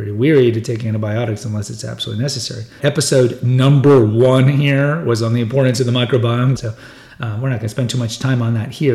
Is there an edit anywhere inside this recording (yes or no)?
yes